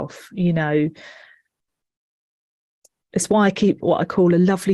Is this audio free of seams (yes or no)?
yes